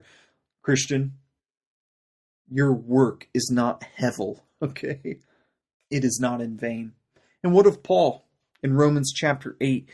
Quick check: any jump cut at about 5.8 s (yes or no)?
yes